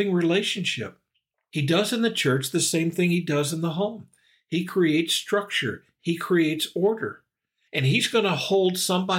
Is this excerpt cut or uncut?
uncut